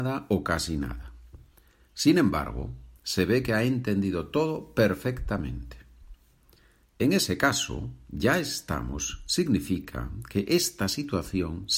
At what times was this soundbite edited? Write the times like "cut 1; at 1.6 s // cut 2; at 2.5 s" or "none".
cut 1; at 3.0 s // cut 2; at 6.8 s

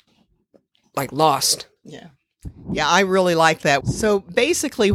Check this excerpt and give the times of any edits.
cut 1; at 1.8 s // cut 2; at 3.8 s

